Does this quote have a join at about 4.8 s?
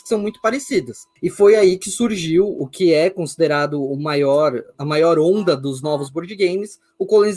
yes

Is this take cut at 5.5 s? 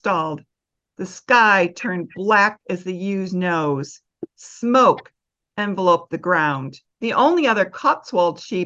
yes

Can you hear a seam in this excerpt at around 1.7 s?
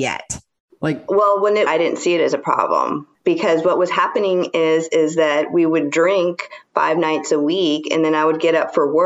yes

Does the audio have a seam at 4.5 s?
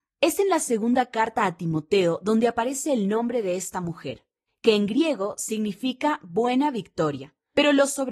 yes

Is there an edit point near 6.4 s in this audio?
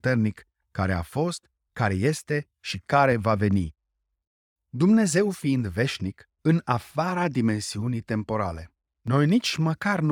yes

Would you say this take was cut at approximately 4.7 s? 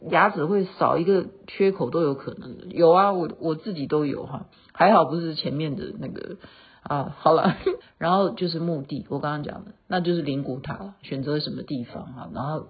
no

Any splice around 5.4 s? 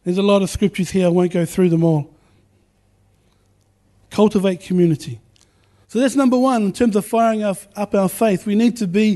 no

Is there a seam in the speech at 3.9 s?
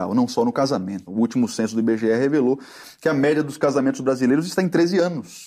no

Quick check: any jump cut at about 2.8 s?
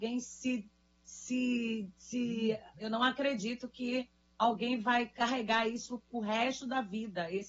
yes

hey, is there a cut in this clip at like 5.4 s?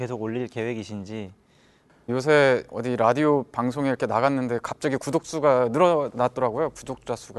no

